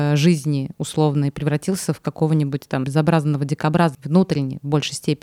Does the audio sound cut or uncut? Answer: cut